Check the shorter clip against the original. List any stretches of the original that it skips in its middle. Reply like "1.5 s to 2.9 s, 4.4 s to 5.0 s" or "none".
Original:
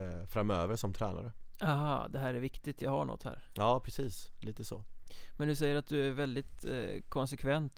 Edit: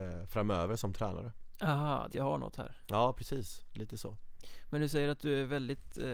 2.1 s to 2.8 s